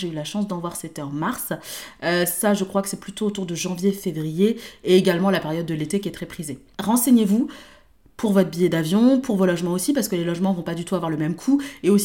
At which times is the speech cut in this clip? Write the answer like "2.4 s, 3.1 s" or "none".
none